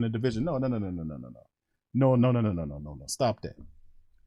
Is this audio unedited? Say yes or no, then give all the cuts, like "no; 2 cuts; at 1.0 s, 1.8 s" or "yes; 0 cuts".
no; 1 cut; at 2.8 s